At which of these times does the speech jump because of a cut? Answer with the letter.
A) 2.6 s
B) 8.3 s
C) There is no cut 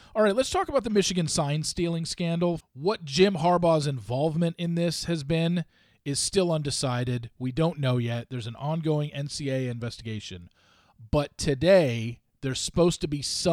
A